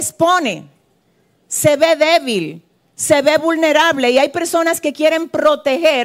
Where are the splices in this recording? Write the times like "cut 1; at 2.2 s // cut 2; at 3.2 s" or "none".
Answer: none